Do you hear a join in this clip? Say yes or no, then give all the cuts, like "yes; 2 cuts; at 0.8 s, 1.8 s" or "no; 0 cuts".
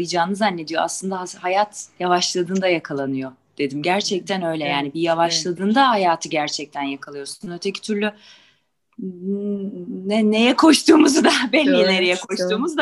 no; 0 cuts